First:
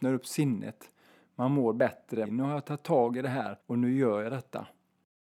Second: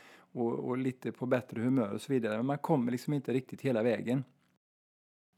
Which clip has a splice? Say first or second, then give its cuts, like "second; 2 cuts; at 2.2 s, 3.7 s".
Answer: first; 2 cuts; at 2.2 s, 3.6 s